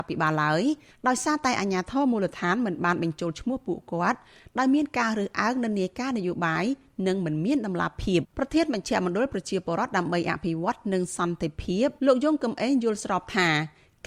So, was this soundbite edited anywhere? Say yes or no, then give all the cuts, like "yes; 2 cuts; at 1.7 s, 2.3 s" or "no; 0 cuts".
yes; 2 cuts; at 8.2 s, 12.0 s